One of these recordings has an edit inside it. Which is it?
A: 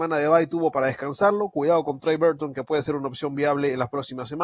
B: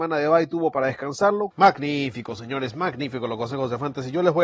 B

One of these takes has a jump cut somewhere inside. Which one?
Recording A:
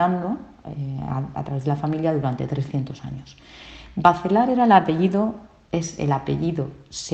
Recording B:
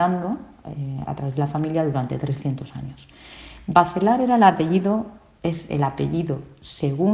B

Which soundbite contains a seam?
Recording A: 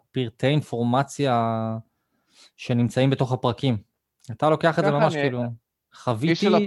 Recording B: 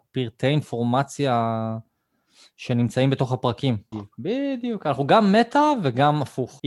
B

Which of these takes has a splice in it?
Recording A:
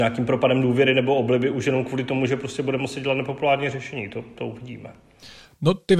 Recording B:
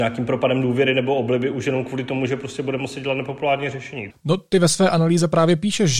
B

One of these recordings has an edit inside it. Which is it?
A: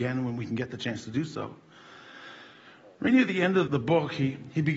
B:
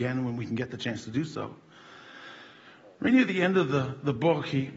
A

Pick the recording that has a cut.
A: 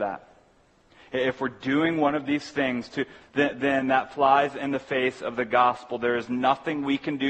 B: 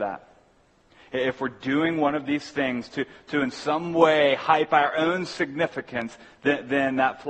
A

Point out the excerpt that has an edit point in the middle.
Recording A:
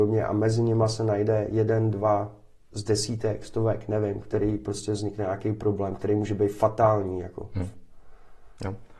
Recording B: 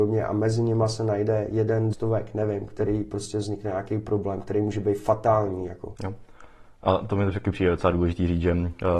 B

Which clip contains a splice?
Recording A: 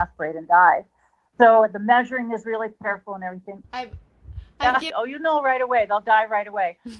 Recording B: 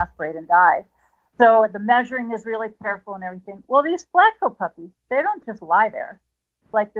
A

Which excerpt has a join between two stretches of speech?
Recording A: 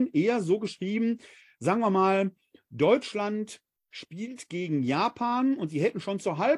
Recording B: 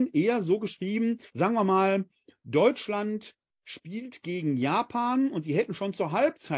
B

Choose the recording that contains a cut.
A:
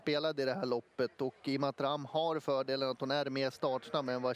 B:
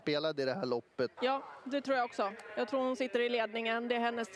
B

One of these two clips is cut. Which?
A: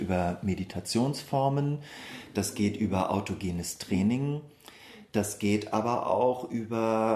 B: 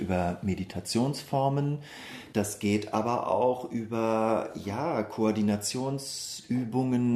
B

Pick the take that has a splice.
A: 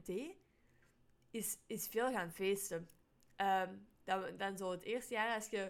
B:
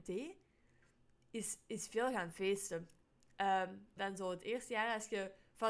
B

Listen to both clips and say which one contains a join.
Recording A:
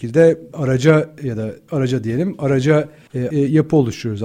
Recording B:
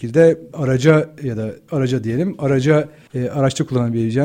A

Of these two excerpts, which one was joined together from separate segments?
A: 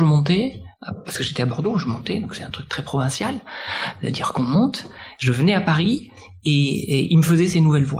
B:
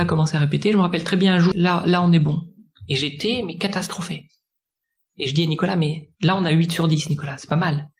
B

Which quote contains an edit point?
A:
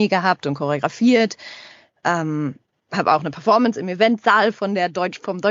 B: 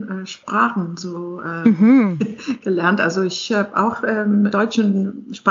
B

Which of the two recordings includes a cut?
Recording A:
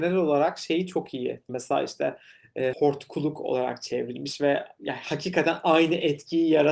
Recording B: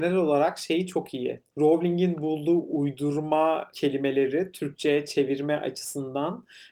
A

